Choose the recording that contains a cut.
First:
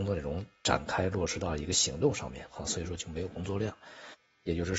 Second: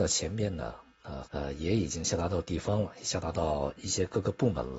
second; 1 cut; at 1.3 s

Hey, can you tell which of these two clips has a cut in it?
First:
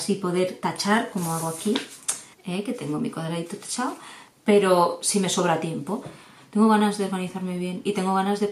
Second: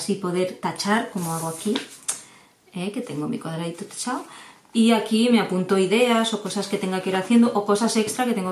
first; 3 cuts; at 2.3 s, 4.3 s, 6.4 s

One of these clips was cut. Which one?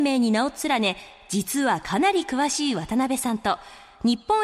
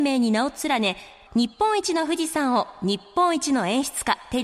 second; 1 cut; at 1.3 s

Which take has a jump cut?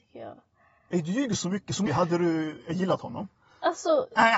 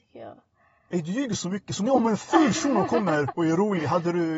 first; 1 cut; at 1.9 s

